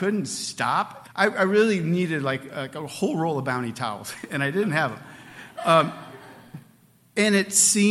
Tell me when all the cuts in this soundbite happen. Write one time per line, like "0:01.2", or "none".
0:01.0